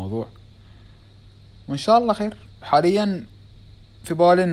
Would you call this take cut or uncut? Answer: cut